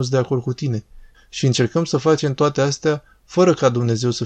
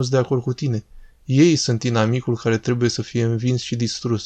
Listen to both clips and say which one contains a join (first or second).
first